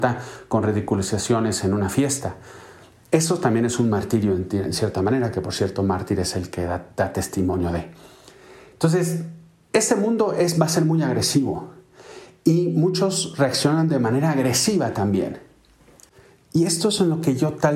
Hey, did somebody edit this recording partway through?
no; 0 cuts

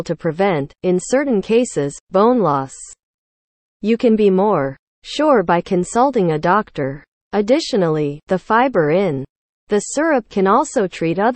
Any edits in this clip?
yes; 1 cut; at 7.2 s

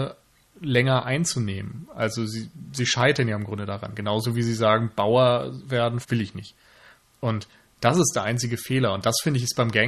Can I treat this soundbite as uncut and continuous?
no; 1 cut; at 6.0 s

